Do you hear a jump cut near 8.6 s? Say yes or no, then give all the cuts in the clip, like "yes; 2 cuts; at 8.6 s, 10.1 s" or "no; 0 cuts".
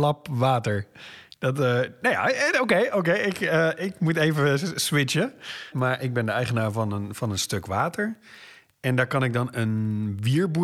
no; 1 cut; at 5.7 s